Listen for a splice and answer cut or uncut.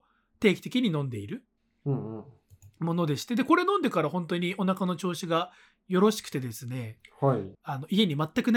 cut